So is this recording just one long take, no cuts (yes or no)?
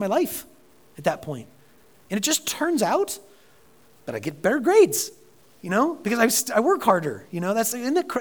yes